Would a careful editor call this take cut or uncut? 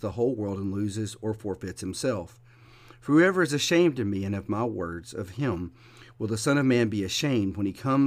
uncut